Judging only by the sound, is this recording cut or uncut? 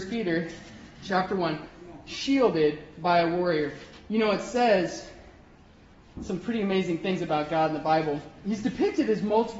uncut